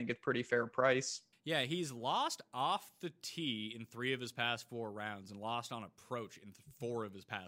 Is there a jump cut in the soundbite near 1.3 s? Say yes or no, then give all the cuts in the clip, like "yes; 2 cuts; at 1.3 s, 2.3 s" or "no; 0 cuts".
yes; 1 cut; at 1.3 s